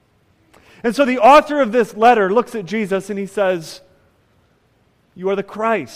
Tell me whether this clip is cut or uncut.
uncut